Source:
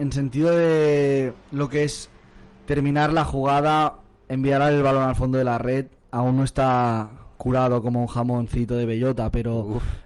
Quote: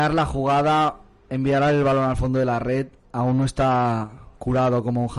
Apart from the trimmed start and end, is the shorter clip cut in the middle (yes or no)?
no